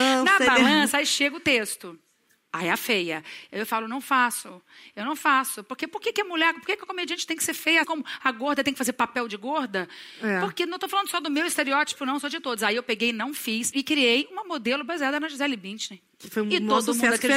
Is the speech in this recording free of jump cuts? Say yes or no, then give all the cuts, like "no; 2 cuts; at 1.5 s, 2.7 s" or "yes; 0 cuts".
no; 1 cut; at 7.8 s